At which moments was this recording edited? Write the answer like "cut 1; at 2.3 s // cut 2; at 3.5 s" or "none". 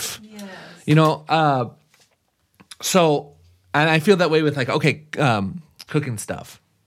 cut 1; at 5.9 s